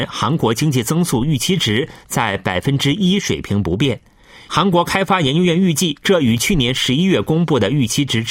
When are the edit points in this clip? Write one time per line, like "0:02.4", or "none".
0:04.5
0:06.0

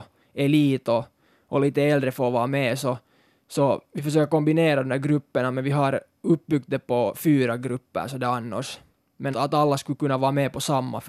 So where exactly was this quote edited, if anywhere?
0:09.3

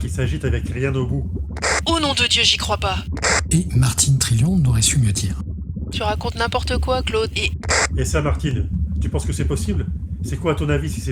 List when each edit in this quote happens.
0:05.9
0:07.3

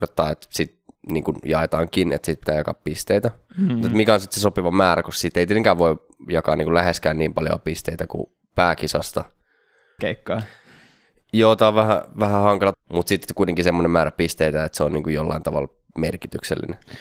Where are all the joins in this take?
0:10.0
0:12.7

